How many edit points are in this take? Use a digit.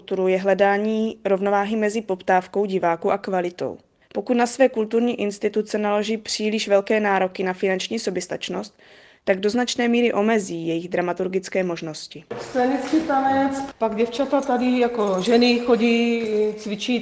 2